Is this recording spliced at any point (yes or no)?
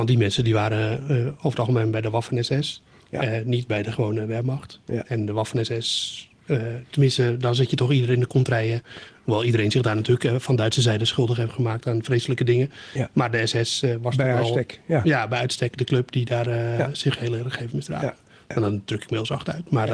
no